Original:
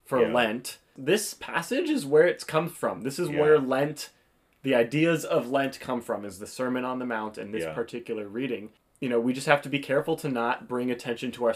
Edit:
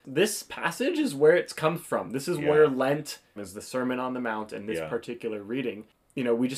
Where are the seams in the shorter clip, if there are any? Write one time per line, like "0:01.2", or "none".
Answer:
0:03.4